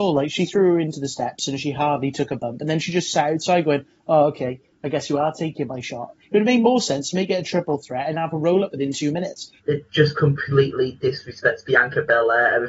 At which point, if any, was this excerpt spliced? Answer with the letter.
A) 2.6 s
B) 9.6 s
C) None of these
B